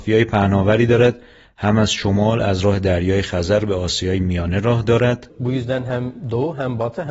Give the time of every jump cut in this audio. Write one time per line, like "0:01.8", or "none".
0:05.3